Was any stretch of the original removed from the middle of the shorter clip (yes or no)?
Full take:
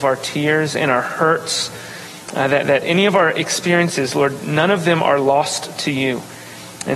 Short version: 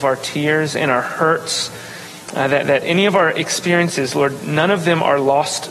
no